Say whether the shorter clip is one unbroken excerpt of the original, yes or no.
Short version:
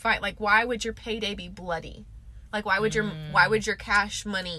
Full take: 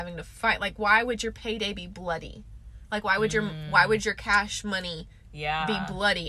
yes